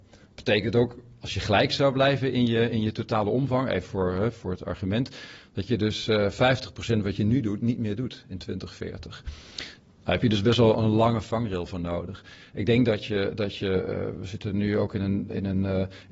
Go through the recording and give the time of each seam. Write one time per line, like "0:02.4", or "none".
none